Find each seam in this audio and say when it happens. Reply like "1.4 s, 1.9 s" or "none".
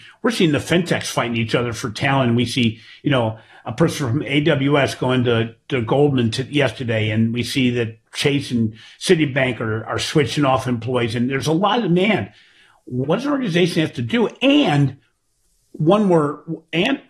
13.0 s